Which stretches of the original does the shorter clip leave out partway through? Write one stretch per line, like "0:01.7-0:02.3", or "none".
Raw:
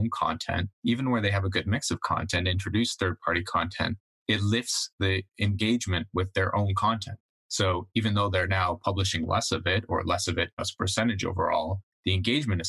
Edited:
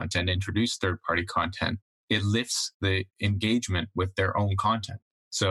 none